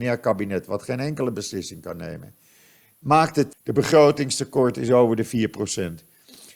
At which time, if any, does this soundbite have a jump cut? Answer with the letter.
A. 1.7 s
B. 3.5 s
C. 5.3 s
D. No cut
B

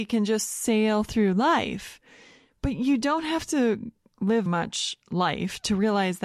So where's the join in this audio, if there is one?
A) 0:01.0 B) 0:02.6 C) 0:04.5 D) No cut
C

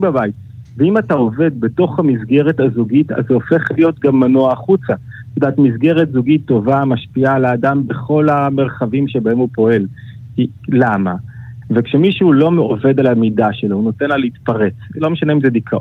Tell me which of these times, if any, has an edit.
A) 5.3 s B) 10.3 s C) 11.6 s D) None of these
C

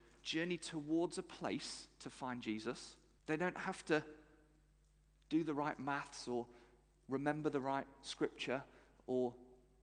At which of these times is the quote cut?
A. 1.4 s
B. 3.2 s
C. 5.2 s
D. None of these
B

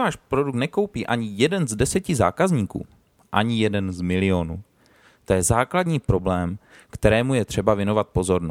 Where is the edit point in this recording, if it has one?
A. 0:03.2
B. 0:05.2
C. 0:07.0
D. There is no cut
A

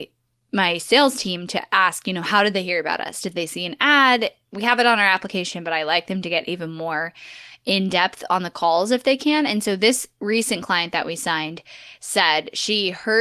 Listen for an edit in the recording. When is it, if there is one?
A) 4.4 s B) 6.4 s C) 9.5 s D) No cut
D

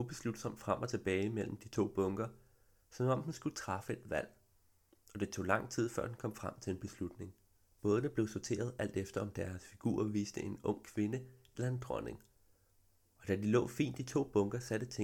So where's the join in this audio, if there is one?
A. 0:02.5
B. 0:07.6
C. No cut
B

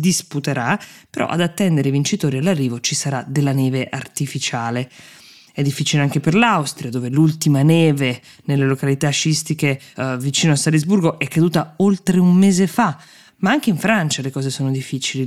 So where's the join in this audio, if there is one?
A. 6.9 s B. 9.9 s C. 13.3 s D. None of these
D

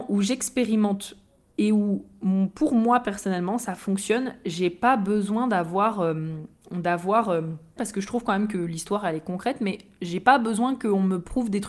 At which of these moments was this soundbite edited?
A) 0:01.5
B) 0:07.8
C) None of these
B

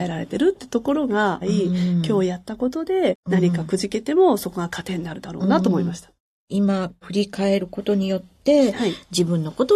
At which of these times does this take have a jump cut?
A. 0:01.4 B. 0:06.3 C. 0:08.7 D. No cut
A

